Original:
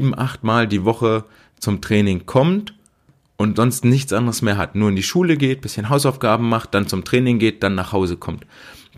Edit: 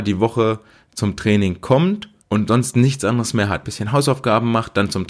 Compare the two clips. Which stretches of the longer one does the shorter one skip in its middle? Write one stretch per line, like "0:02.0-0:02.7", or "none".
0:02.8-0:03.3
0:04.7-0:05.6